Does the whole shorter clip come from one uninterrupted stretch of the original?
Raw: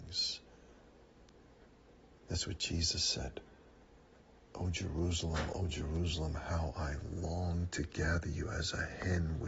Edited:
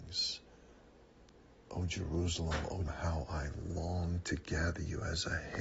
no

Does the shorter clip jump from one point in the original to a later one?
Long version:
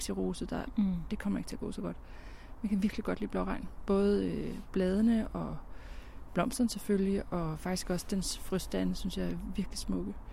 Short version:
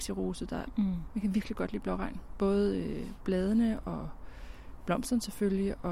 yes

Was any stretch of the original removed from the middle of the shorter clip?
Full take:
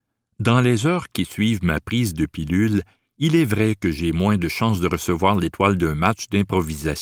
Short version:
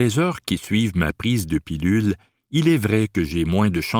no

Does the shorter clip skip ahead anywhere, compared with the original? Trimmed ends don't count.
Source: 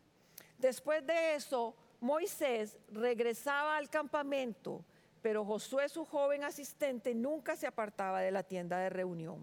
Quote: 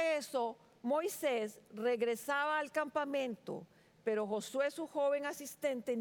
no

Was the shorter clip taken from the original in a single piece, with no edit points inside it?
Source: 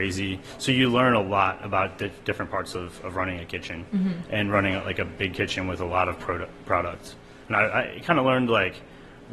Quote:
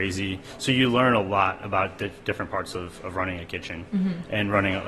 yes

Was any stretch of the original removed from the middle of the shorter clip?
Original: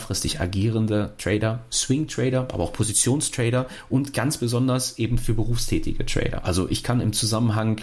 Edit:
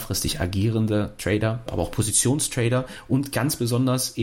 yes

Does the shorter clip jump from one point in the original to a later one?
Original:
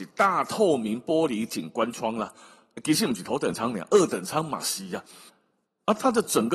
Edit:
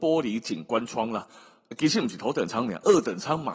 no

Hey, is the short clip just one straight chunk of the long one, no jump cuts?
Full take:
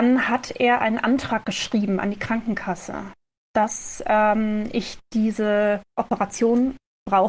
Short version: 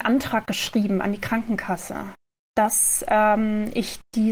yes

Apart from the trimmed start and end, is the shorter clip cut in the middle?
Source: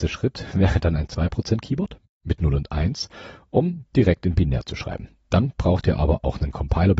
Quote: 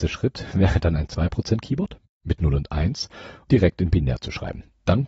yes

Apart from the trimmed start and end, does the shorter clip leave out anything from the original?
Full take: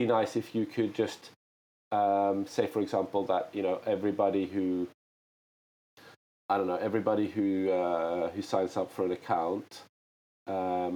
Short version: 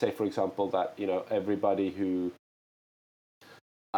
no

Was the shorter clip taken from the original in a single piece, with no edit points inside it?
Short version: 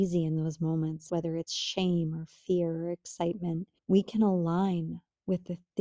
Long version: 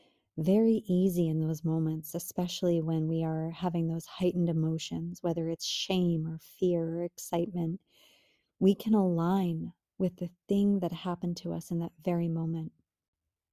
no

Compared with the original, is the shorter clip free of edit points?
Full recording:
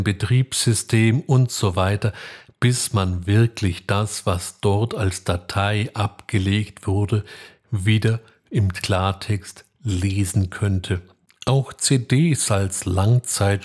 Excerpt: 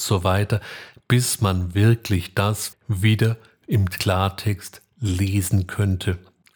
no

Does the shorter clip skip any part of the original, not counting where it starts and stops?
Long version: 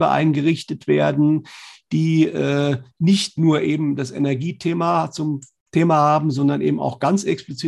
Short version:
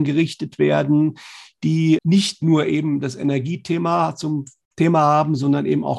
yes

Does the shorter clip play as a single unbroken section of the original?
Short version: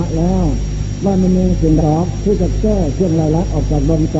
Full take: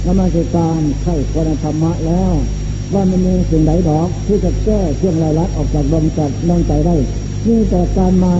no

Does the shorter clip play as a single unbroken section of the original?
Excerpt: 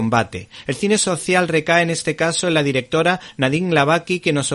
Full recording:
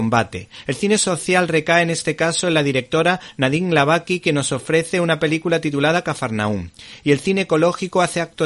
yes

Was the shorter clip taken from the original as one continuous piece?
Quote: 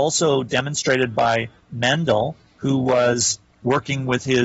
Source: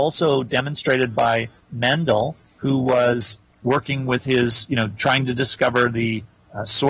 yes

